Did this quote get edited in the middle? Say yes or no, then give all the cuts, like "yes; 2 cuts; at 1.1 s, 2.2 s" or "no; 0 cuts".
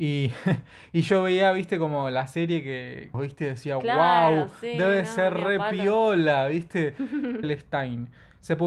yes; 2 cuts; at 3.1 s, 7.4 s